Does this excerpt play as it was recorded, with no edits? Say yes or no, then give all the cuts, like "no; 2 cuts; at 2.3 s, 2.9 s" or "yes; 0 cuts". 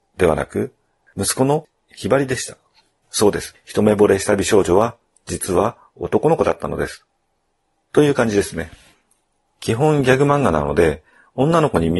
yes; 0 cuts